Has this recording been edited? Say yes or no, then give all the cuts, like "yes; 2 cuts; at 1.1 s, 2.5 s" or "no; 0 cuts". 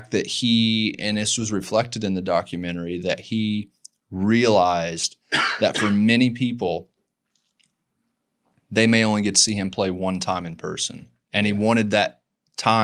no; 0 cuts